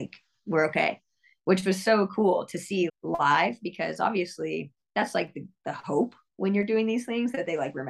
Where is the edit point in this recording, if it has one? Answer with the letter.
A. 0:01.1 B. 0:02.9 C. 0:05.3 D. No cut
B